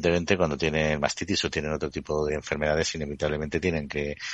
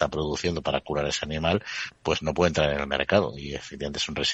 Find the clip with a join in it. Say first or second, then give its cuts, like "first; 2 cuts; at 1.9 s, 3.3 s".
first; 1 cut; at 2.3 s